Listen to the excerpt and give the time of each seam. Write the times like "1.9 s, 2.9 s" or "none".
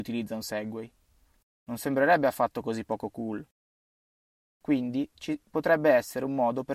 1.4 s